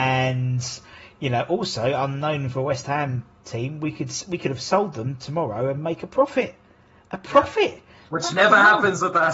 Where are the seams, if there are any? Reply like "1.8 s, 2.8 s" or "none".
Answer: none